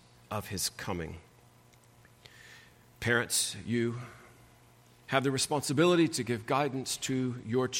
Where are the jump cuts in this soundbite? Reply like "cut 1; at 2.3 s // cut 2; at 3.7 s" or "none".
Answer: none